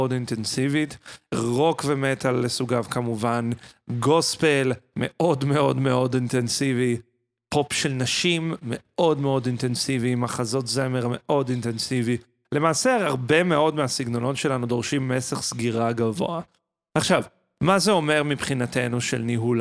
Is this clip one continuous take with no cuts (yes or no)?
yes